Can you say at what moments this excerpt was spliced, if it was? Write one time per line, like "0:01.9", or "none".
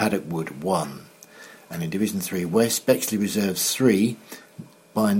none